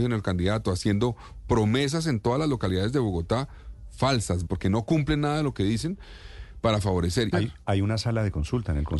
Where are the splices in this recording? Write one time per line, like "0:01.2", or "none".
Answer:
0:04.5
0:07.3